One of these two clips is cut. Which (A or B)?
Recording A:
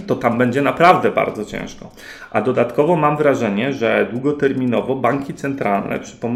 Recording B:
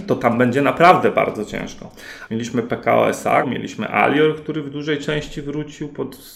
B